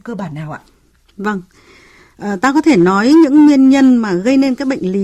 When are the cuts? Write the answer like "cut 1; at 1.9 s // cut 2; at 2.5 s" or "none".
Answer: none